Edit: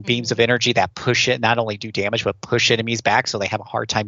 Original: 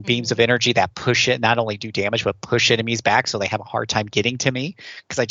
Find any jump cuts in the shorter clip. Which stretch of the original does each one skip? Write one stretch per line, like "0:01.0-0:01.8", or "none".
none

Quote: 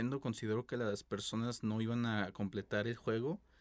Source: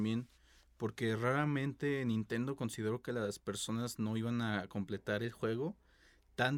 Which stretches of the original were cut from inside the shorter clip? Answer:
none

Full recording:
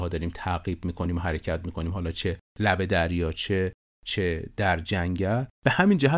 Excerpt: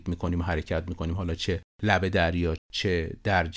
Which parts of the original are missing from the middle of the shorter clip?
0:03.3-0:03.9

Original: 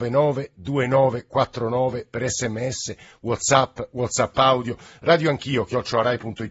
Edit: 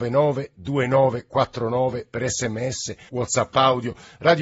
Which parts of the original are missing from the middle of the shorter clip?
0:03.1-0:03.9

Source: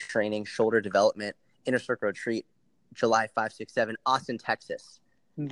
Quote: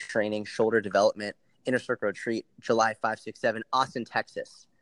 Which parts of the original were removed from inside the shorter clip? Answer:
0:02.5-0:02.8

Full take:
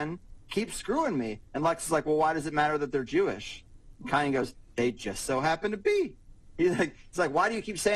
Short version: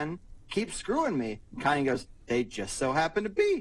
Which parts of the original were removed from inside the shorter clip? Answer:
0:01.5-0:03.9

